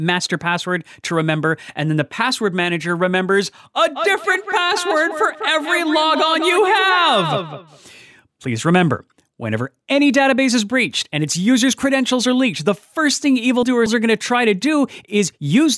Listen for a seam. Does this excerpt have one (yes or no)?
no